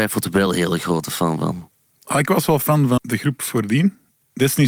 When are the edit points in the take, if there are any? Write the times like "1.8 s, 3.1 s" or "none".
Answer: 3.0 s